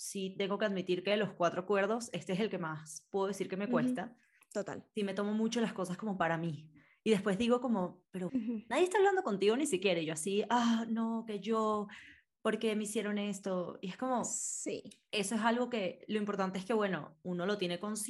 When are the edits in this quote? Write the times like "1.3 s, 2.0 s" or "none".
8.3 s